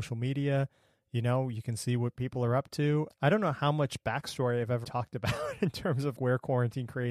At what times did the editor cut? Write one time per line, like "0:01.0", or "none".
0:03.1
0:04.8
0:06.2